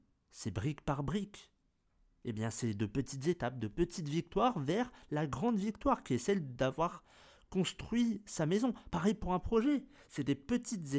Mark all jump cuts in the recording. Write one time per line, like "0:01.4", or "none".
none